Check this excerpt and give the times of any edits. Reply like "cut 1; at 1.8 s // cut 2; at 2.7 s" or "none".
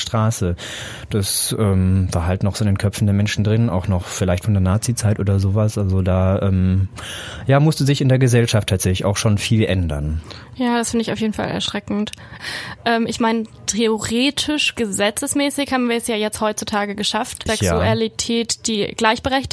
cut 1; at 12.4 s // cut 2; at 17.5 s